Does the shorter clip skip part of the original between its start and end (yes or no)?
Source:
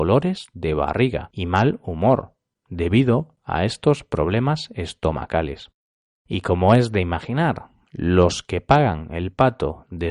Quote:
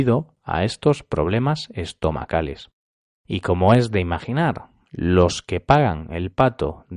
no